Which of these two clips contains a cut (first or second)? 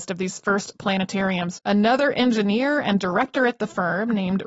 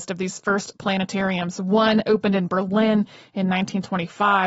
first